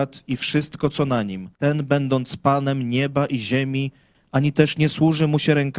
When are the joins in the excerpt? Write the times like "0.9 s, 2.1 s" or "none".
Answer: 1.5 s, 4.1 s